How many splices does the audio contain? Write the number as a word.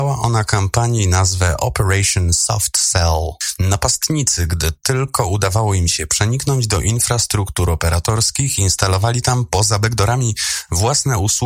zero